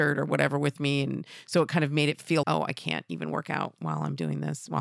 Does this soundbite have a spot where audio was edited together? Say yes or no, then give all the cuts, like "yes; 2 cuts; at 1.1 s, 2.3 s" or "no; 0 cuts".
yes; 1 cut; at 2.4 s